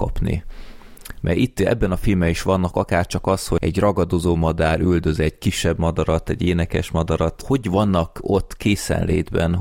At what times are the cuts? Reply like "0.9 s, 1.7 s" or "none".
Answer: 3.6 s